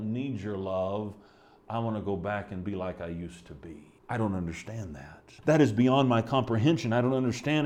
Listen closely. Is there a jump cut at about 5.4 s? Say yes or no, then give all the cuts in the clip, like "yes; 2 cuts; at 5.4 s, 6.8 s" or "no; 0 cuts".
yes; 2 cuts; at 4.0 s, 5.4 s